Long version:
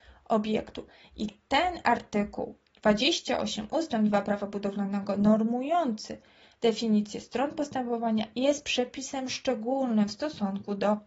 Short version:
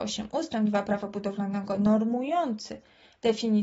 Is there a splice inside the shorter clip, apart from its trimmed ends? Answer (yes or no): no